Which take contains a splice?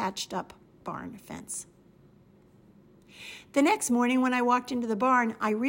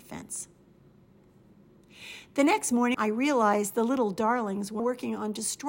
second; 2 cuts; at 2.9 s, 4.8 s

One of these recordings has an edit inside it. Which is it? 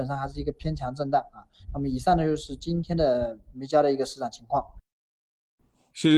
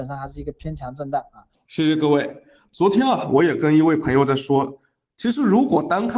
second; 1 cut; at 1.5 s

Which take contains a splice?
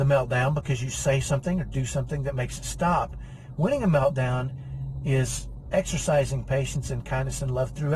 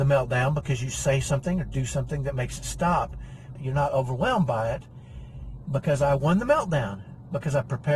second; 2 cuts; at 3.6 s, 5.7 s

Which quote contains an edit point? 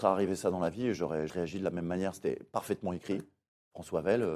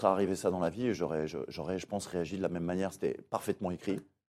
first; 1 cut; at 1.3 s

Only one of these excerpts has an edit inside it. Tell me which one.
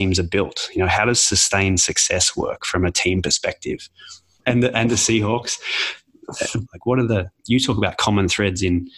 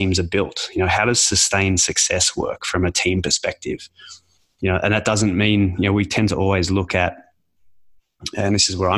first; 2 cuts; at 4.4 s, 6.7 s

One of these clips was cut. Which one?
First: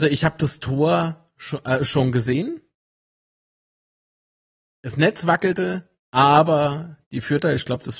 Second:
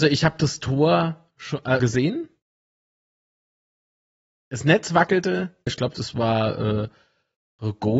second; 2 cuts; at 1.8 s, 5.7 s

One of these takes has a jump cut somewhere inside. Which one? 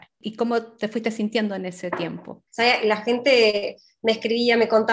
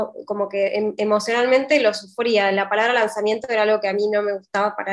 first; 1 cut; at 2.5 s

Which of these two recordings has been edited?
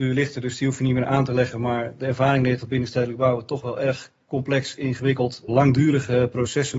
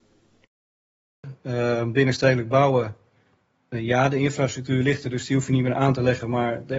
first; 1 cut; at 5.5 s

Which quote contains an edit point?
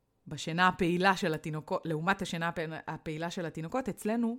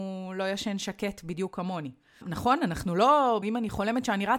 second; 2 cuts; at 2.2 s, 3.4 s

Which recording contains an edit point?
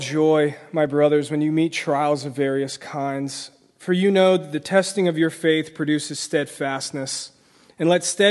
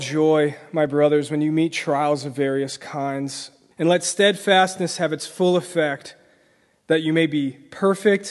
second; 1 cut; at 3.7 s

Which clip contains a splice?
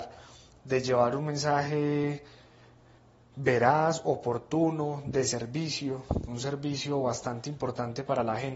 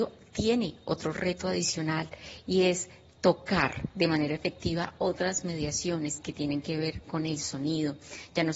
first; 1 cut; at 6.3 s

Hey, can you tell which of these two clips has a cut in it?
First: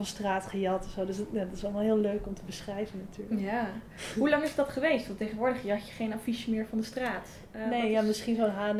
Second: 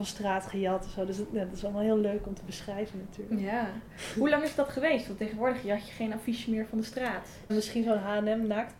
second; 1 cut; at 7.5 s

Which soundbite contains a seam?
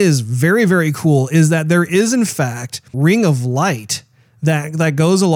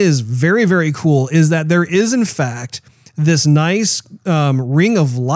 first; 1 cut; at 2.9 s

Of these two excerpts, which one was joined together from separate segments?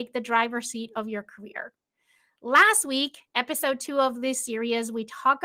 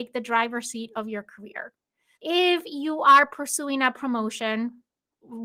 second; 1 cut; at 2.2 s

